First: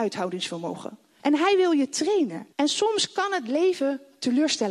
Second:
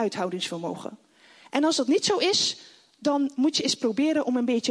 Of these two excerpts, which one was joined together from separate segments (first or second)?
first